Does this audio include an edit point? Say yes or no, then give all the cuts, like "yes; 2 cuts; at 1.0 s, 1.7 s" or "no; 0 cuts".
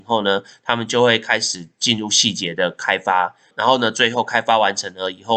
no; 0 cuts